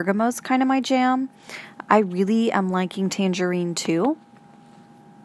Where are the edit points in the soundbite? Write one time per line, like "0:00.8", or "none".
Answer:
none

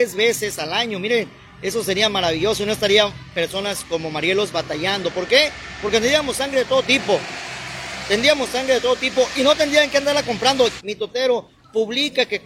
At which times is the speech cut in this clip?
0:10.8

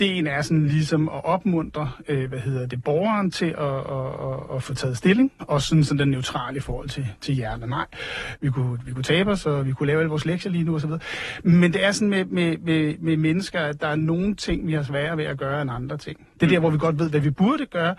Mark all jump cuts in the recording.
0:05.4
0:08.4

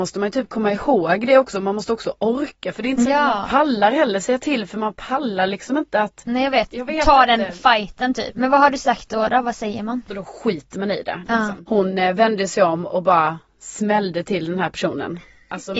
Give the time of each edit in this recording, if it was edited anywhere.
0:08.3
0:10.1

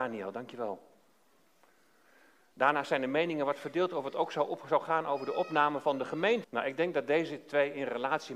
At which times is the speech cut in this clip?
0:06.4

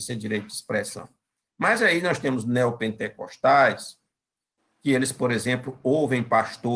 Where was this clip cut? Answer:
none

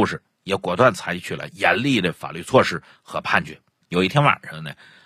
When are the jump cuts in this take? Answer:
0:03.8

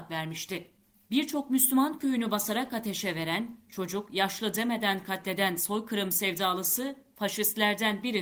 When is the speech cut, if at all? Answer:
0:03.7

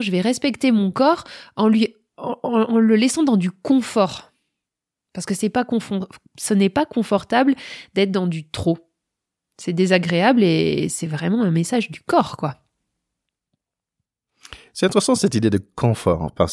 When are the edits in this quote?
none

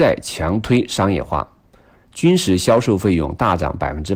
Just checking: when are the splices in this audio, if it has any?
0:02.0

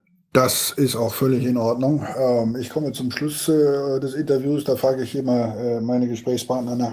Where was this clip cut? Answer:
none

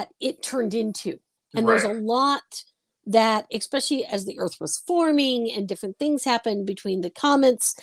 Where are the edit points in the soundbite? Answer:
0:01.4

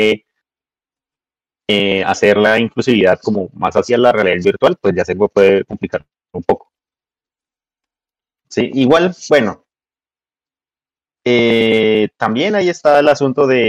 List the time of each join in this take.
none

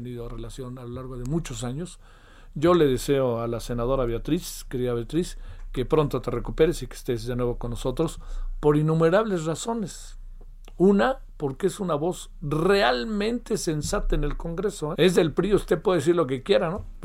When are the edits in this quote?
0:15.0

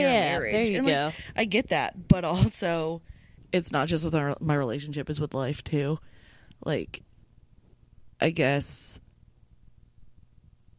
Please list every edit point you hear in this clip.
none

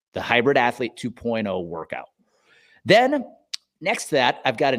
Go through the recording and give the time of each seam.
none

